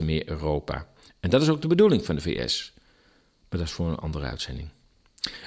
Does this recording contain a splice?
no; 0 cuts

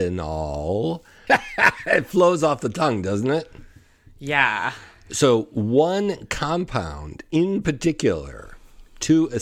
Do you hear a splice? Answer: yes; 1 cut; at 1.3 s

